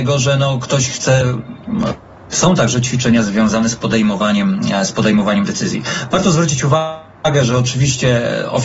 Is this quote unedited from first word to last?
no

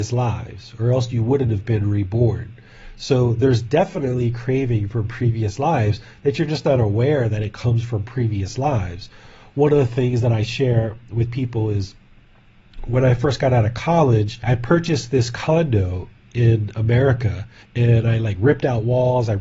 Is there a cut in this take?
yes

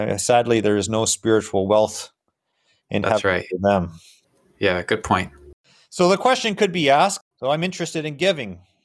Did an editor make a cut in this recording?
no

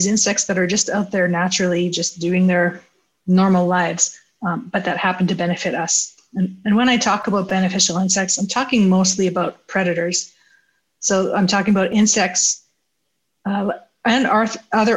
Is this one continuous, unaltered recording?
yes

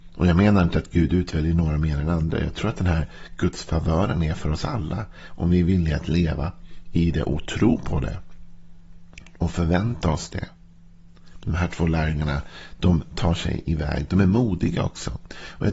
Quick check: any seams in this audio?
no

